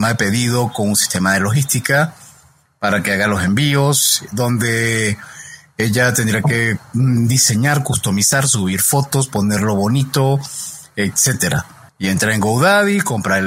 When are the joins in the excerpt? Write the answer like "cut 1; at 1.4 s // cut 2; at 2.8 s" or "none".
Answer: cut 1; at 11.9 s